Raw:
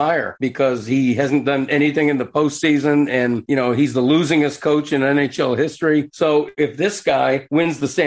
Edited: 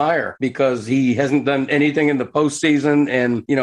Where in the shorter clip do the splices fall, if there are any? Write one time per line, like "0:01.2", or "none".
none